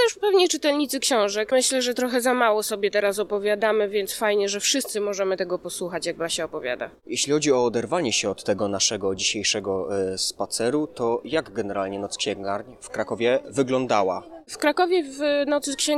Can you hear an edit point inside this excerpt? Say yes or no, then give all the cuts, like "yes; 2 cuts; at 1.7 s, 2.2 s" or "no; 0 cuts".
yes; 1 cut; at 1.5 s